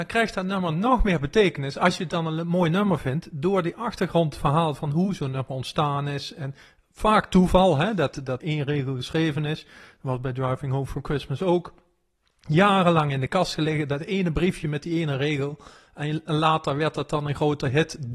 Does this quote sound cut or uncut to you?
cut